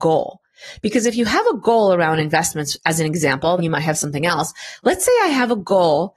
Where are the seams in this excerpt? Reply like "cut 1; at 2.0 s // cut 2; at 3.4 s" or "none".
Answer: cut 1; at 3.6 s